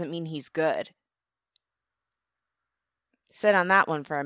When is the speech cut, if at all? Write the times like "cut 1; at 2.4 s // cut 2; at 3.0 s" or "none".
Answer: none